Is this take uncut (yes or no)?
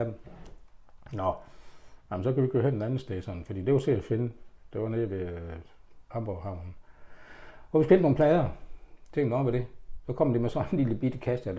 no